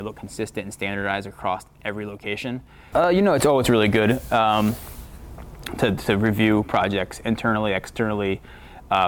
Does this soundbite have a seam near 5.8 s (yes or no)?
no